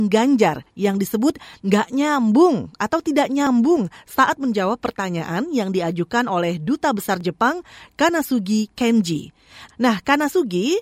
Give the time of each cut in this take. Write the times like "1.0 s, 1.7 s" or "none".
9.7 s